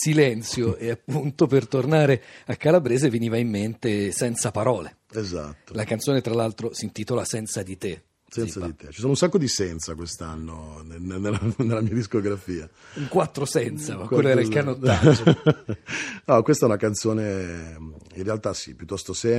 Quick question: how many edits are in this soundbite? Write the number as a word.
zero